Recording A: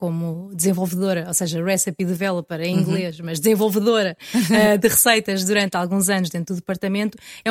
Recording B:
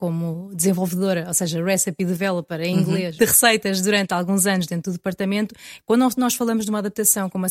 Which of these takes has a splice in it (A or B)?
B